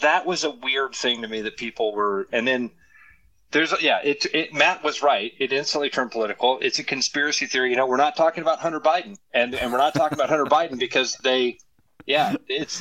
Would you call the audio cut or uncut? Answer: cut